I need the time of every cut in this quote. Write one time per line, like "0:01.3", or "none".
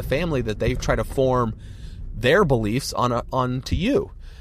none